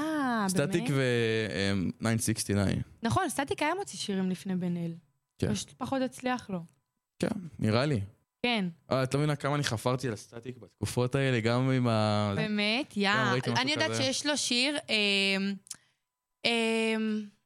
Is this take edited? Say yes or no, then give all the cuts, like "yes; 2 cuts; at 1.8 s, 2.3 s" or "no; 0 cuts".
yes; 2 cuts; at 8.2 s, 12.4 s